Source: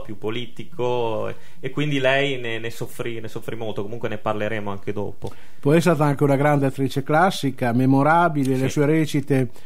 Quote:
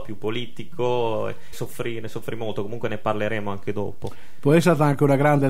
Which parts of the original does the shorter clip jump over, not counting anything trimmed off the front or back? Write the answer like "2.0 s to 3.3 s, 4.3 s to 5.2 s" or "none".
1.5 s to 2.7 s